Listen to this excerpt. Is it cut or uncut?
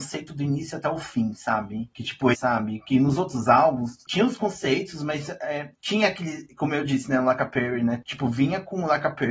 cut